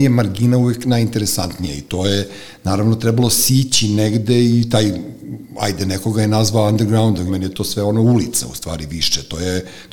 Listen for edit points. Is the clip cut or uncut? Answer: cut